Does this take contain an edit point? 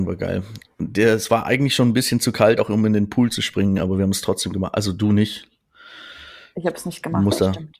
no; 0 cuts

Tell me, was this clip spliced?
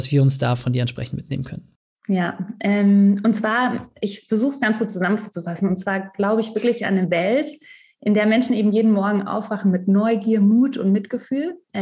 no; 0 cuts

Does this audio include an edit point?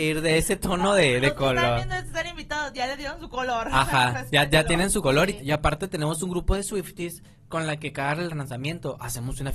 yes; 1 cut; at 5.4 s

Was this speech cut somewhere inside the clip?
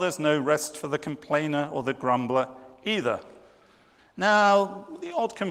yes; 1 cut; at 4.0 s

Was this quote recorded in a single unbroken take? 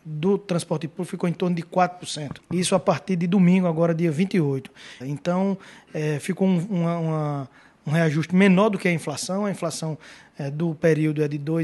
no; 2 cuts; at 2.4 s, 5.0 s

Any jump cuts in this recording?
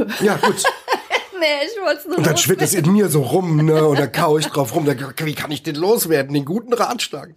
no; 0 cuts

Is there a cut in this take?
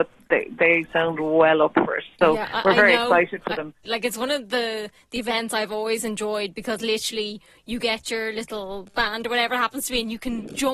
yes; 1 cut; at 3.8 s

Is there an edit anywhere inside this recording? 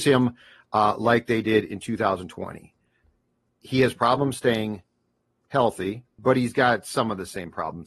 yes; 1 cut; at 6.2 s

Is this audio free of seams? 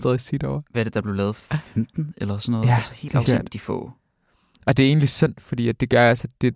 no; 1 cut; at 3.3 s

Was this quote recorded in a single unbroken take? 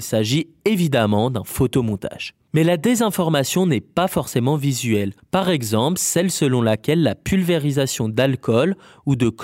no; 1 cut; at 5.2 s

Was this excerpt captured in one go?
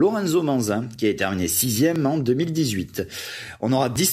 yes; 0 cuts

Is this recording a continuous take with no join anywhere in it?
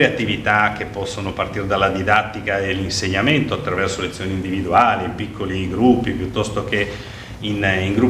yes; 0 cuts

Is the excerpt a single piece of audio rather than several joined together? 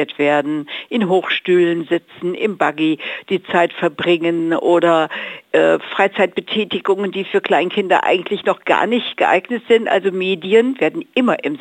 yes; 0 cuts

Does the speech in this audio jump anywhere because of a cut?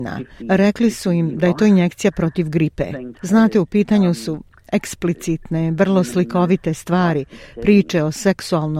yes; 1 cut; at 3.2 s

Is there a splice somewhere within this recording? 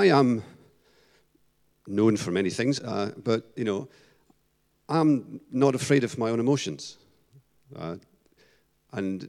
yes; 1 cut; at 2.8 s

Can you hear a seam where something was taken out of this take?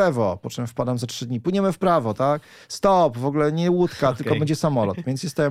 no; 0 cuts

